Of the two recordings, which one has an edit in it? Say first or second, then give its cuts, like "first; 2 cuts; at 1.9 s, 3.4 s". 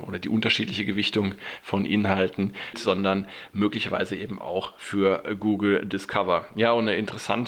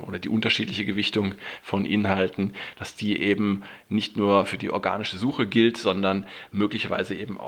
first; 1 cut; at 2.7 s